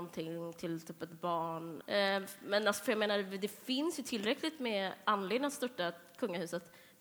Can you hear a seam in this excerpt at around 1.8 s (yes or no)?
yes